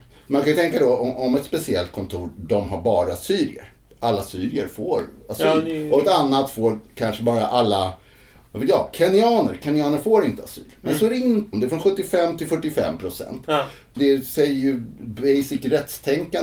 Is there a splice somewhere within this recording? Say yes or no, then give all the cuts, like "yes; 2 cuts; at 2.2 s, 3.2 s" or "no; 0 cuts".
yes; 2 cuts; at 11.5 s, 13.9 s